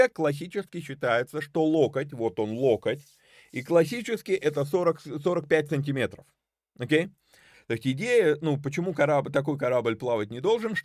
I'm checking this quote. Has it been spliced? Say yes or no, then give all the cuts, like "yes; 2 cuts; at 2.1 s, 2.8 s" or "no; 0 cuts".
yes; 1 cut; at 7.5 s